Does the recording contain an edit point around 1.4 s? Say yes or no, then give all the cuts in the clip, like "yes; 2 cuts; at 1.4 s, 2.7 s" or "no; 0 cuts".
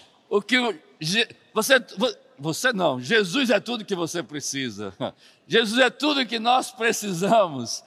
no; 0 cuts